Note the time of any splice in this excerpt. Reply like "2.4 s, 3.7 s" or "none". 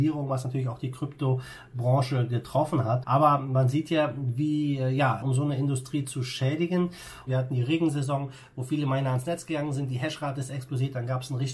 3.0 s, 5.2 s, 7.3 s